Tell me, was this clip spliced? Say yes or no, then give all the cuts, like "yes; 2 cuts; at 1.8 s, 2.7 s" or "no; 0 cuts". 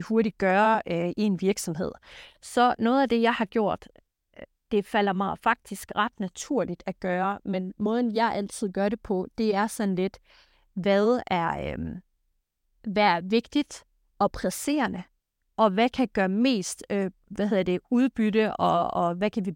no; 0 cuts